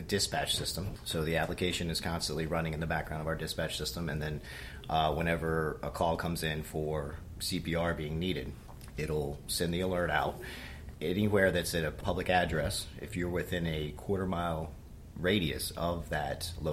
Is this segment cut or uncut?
uncut